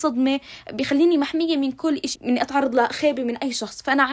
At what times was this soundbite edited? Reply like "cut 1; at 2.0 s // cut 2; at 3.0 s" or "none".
cut 1; at 2.1 s